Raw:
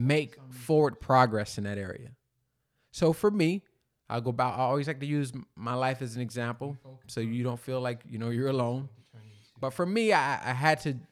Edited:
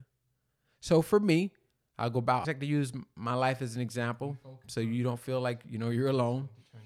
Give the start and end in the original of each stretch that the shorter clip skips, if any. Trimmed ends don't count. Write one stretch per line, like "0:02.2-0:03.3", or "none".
0:04.6-0:04.8